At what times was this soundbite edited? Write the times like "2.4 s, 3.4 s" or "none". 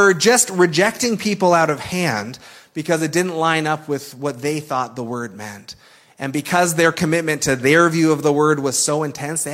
none